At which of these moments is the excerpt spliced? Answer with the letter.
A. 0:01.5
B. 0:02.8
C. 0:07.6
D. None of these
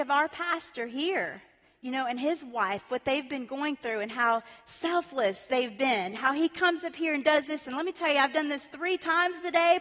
D